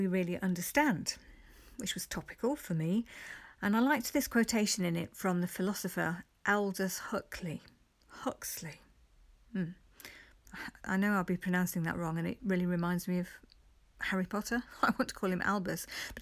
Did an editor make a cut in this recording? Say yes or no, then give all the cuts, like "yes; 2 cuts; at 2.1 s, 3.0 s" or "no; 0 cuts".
no; 0 cuts